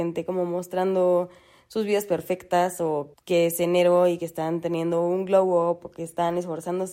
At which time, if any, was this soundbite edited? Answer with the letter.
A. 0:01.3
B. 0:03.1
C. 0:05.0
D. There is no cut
B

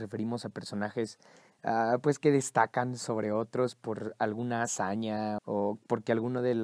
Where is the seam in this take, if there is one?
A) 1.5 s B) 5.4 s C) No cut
B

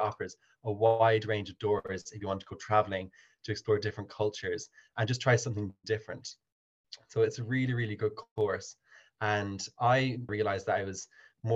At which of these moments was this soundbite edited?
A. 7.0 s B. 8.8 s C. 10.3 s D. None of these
C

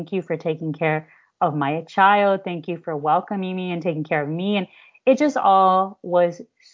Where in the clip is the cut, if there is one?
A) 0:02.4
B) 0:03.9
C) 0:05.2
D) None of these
D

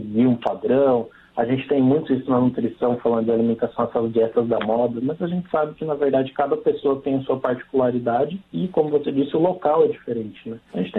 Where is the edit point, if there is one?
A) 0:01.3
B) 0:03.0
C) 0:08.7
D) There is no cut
D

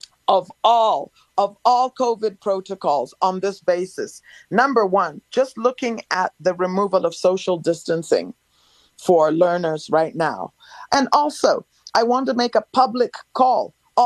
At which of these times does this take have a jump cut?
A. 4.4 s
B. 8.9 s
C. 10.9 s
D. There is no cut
C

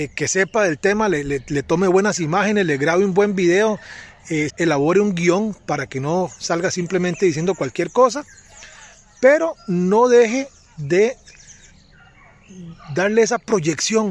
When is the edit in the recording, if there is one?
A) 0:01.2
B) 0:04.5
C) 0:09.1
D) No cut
B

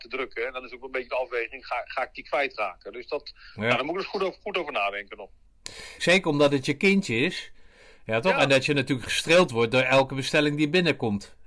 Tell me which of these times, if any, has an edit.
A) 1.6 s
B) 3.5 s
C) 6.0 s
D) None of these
C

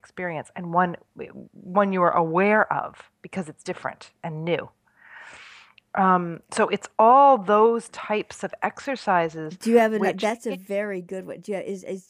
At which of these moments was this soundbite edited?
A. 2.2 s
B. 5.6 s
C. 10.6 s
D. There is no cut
D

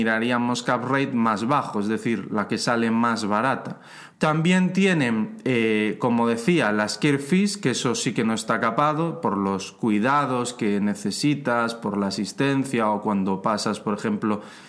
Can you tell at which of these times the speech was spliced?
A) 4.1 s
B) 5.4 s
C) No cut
A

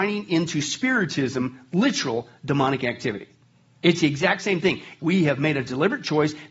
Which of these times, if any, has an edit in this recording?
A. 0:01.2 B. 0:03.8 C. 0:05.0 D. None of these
C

